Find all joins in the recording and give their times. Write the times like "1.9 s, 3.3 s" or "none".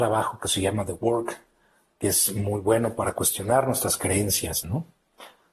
4.6 s